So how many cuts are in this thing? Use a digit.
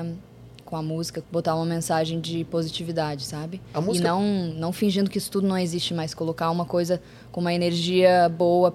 1